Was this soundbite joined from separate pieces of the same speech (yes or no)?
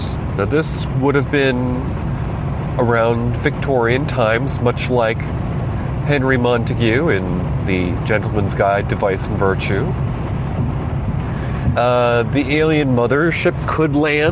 yes